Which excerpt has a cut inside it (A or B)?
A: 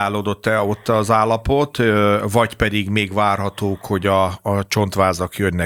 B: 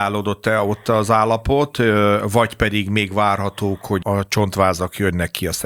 B